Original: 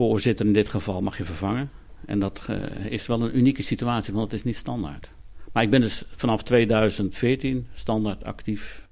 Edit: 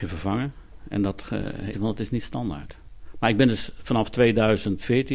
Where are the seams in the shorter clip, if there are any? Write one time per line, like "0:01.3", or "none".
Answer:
0:01.7